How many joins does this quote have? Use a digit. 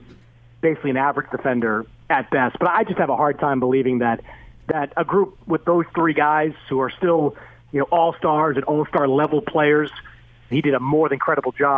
1